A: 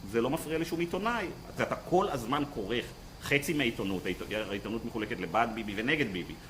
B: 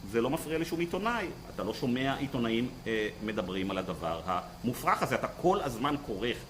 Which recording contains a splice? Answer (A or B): A